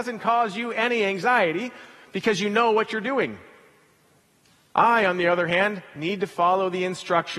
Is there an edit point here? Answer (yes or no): no